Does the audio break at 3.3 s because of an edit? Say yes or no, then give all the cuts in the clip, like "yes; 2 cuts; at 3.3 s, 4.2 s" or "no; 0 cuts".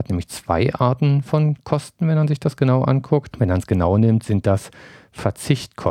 yes; 1 cut; at 3.3 s